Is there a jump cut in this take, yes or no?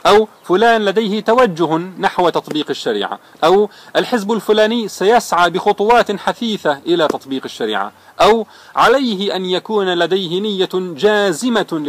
yes